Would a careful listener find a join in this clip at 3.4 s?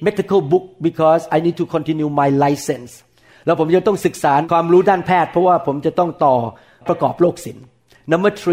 no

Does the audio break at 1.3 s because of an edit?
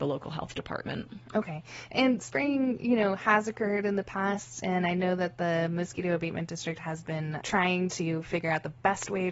no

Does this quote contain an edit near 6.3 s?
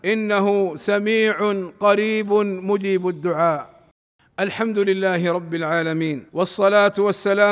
yes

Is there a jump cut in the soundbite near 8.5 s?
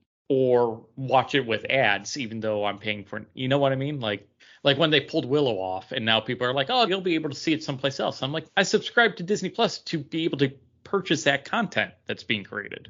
yes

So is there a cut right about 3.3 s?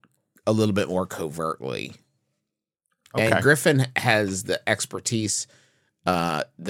no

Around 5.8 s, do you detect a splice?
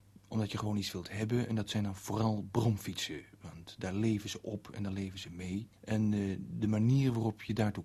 yes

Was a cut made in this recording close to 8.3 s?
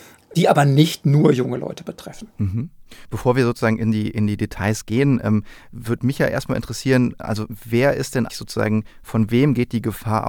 yes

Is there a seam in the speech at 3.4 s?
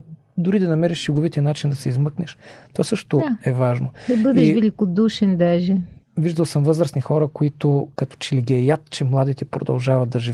no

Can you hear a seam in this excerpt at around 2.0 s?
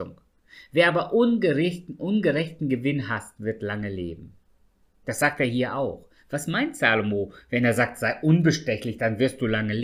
no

